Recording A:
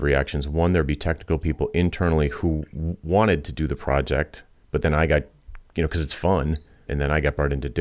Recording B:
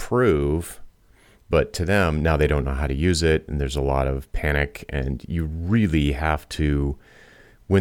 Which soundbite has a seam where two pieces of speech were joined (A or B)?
A